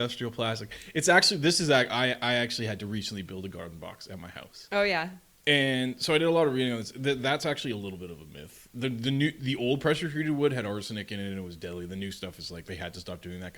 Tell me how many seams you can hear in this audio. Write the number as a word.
zero